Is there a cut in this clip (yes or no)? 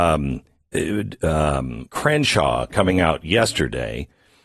yes